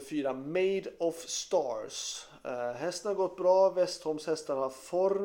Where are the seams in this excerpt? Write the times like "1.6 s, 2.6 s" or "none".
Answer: none